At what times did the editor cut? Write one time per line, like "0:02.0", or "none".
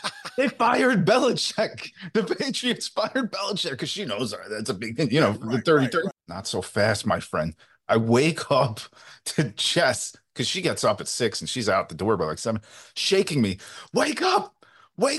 0:06.1